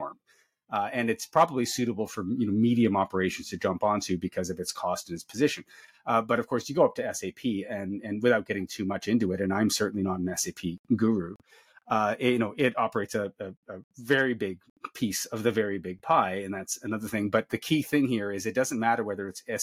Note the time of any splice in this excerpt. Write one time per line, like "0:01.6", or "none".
none